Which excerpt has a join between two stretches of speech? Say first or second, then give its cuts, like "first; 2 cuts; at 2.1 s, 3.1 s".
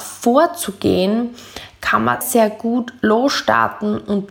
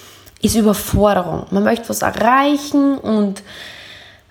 first; 1 cut; at 2.2 s